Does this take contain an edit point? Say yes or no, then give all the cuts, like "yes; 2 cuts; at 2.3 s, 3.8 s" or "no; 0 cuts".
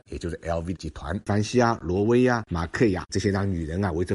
yes; 2 cuts; at 1.3 s, 3.1 s